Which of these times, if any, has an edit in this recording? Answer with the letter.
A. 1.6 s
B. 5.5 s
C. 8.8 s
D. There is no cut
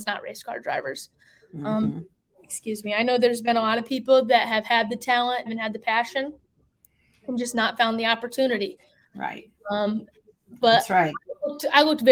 B